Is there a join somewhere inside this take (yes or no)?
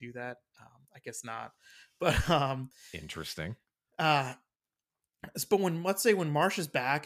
no